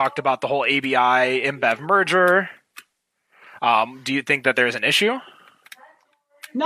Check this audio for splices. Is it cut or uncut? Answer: uncut